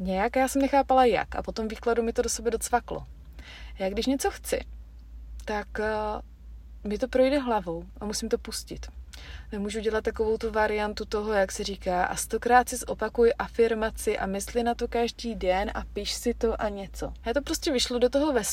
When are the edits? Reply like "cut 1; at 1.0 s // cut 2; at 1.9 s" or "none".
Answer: cut 1; at 17.2 s